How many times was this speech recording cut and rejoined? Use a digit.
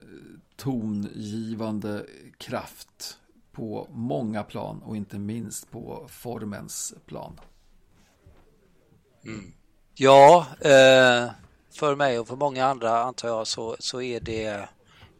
2